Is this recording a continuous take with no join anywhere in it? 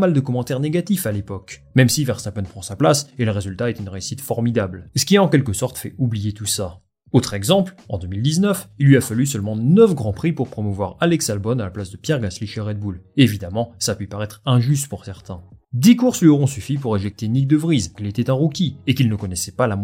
no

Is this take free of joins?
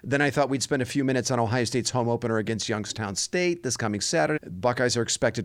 no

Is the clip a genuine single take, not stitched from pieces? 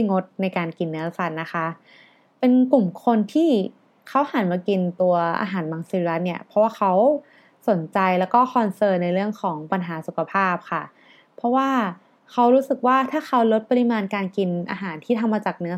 yes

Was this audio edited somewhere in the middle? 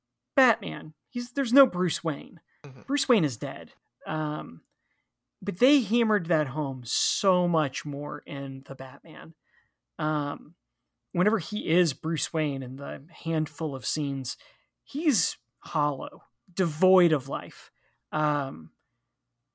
yes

